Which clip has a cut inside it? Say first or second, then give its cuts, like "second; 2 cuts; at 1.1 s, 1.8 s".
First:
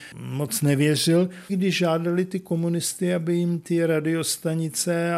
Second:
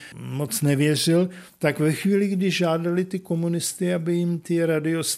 first; 1 cut; at 1.5 s